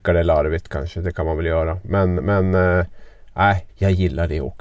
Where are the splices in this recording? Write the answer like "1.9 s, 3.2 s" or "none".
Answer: 3.7 s